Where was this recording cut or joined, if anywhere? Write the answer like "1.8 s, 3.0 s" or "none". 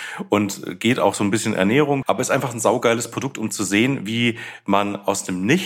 2.0 s